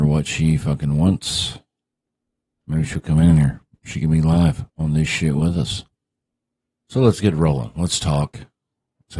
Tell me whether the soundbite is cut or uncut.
cut